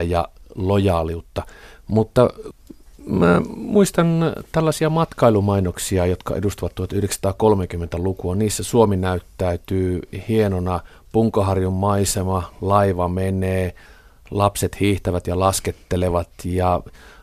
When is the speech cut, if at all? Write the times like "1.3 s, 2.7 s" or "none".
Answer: none